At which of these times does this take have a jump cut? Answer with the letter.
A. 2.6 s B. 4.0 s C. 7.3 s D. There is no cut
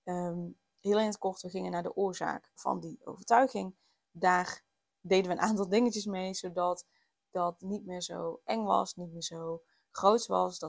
A